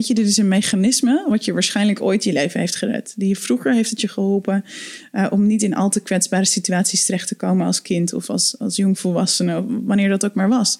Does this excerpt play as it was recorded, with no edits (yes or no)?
yes